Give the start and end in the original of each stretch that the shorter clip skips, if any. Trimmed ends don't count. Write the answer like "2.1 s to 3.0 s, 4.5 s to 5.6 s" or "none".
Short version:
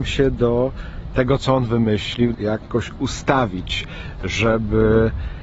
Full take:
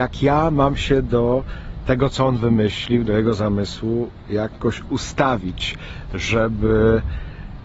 3.1 s to 4.2 s